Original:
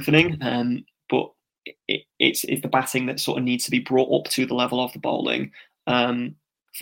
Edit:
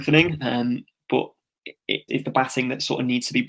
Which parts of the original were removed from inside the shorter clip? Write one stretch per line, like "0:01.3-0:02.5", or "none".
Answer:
0:02.1-0:02.5